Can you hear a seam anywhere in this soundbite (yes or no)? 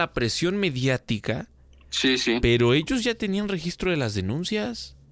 no